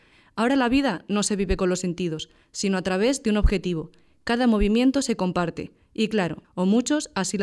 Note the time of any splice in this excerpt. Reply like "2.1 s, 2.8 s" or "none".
6.4 s